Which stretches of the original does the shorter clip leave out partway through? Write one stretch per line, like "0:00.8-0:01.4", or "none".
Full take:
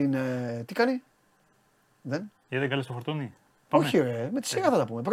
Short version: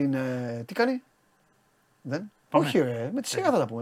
0:02.3-0:03.5

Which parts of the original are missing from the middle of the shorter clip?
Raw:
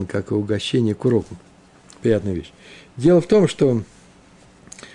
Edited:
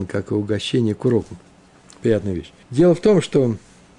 0:02.6-0:02.9

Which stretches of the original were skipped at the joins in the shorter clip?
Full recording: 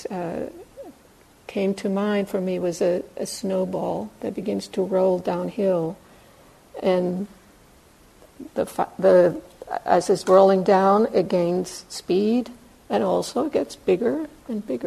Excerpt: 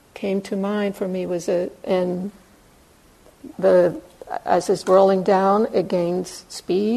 0:03.2-0:06.8
0:08.5-0:08.9

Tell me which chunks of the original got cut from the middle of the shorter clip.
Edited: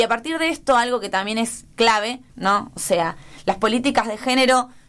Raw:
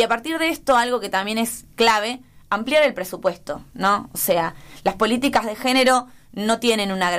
0:02.3-0:03.7

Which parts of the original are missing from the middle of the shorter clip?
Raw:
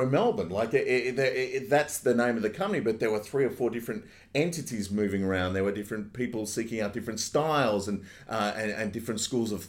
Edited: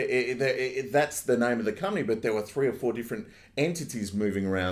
none

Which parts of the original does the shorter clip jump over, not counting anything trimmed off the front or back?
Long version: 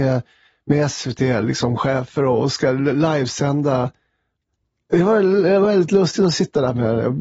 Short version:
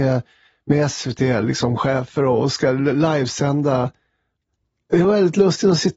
0:05.0-0:05.6

